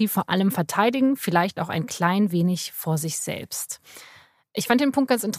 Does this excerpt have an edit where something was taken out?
no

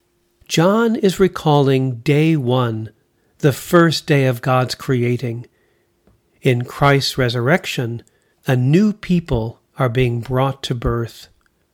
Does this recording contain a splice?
yes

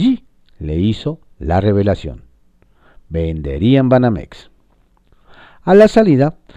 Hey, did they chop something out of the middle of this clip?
no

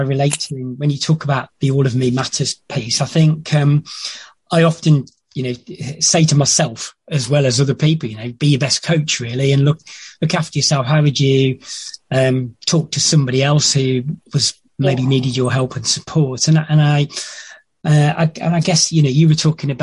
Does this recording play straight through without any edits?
yes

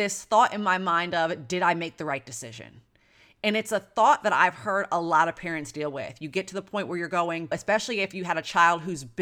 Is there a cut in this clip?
yes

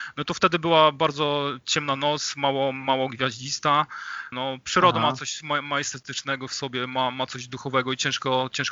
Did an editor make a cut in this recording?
yes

